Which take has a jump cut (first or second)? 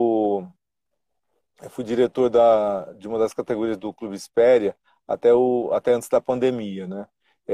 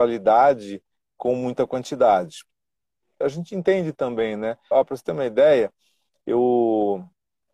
second